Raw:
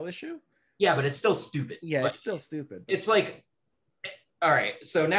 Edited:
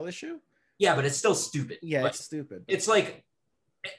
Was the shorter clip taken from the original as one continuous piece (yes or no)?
no